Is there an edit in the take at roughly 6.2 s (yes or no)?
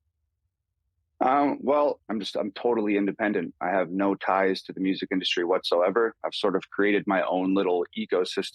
no